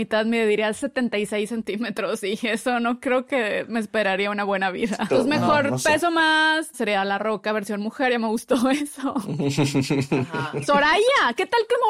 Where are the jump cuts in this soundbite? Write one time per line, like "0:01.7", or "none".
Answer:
0:05.1
0:06.7